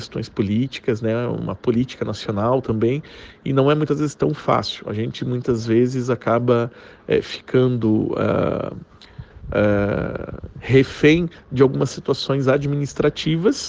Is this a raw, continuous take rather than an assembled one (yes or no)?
yes